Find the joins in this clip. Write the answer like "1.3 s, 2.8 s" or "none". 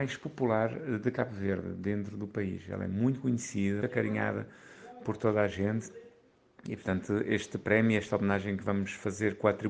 3.8 s